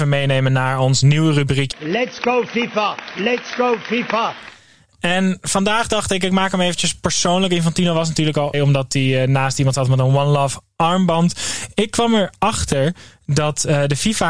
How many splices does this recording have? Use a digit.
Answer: 2